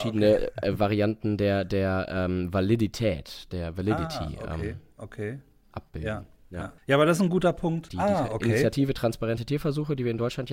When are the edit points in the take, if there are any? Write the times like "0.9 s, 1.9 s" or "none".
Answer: 6.8 s, 7.9 s